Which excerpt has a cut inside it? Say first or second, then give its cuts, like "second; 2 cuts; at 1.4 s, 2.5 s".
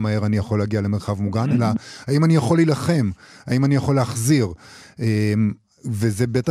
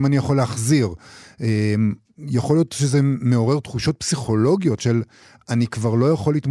second; 2 cuts; at 2.0 s, 4.8 s